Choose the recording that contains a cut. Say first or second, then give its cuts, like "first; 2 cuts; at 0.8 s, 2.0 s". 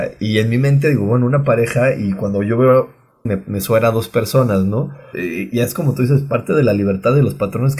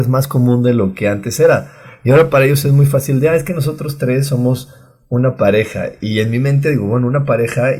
first; 2 cuts; at 3.3 s, 5.1 s